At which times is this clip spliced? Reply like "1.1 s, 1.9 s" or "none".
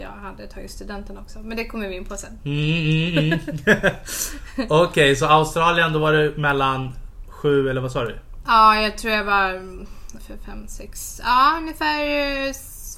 10.2 s

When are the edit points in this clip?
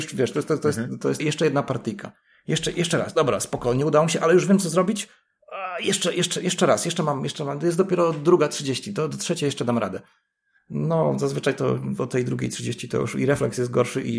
1.2 s

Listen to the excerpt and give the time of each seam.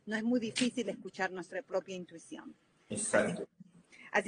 none

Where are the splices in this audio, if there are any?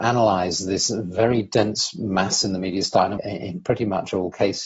3.2 s

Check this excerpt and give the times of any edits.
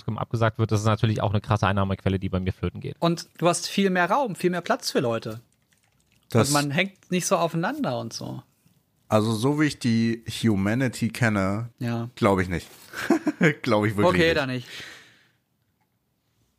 3.0 s, 11.7 s

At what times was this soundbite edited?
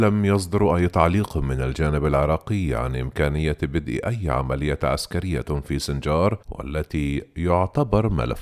6.4 s

